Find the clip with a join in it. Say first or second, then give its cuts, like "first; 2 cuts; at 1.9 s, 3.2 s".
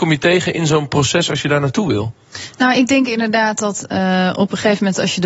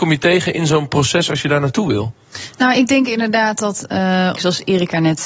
second; 1 cut; at 4.4 s